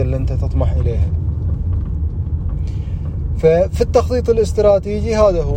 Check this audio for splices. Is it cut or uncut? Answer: uncut